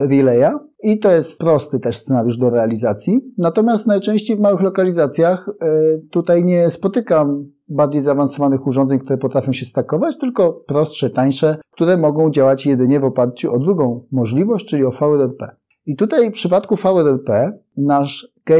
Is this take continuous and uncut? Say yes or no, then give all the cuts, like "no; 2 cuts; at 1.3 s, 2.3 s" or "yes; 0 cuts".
yes; 0 cuts